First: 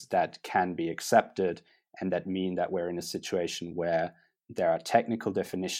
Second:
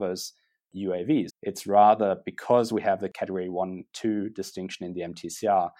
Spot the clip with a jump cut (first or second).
second